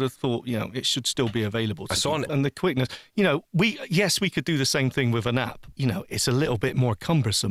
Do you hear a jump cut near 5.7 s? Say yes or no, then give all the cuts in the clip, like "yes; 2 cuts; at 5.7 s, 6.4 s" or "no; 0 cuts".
yes; 2 cuts; at 2.3 s, 5.7 s